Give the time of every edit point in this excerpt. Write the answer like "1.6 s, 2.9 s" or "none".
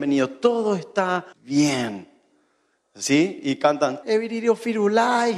1.3 s, 4.0 s